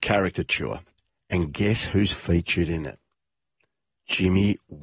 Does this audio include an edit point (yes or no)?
no